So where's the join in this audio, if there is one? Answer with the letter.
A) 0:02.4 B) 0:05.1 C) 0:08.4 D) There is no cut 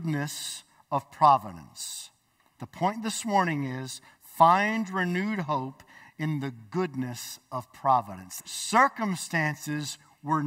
C